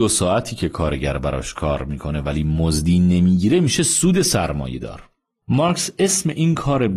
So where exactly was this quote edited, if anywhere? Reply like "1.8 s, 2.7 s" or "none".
5.4 s